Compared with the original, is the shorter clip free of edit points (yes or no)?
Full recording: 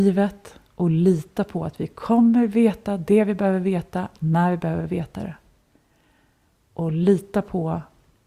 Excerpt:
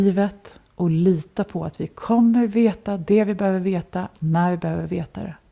yes